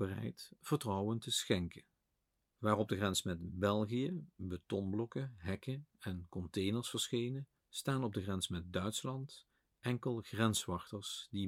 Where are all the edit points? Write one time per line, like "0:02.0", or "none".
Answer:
0:02.4
0:07.6